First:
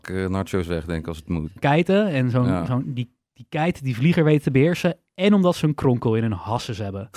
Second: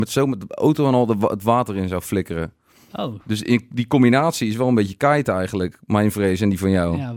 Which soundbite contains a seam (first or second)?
first